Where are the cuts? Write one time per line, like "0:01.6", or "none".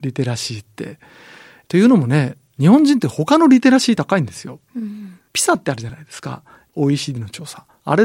none